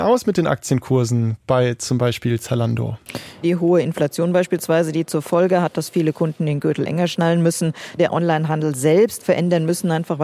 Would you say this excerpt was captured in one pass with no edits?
no; 3 cuts; at 3.4 s, 8.0 s, 9.2 s

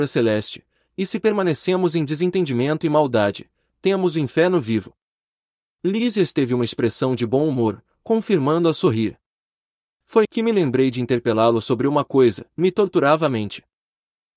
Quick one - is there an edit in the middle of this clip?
yes; 2 cuts; at 10.2 s, 12.5 s

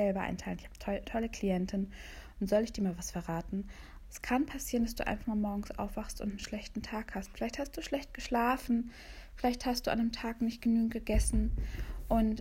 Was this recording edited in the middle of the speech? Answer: yes; 1 cut; at 4.0 s

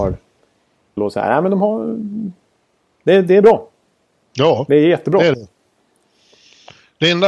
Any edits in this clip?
yes; 1 cut; at 1.0 s

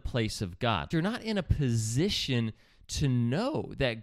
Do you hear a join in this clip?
yes; 1 cut; at 0.9 s

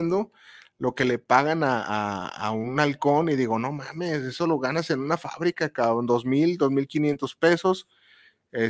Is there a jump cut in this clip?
no; 0 cuts

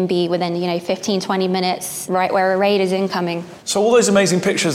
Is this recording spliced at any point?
yes; 1 cut; at 3.6 s

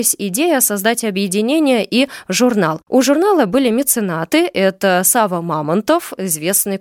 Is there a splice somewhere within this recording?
no; 0 cuts

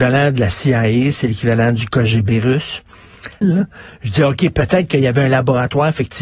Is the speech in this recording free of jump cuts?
no; 1 cut; at 3.4 s

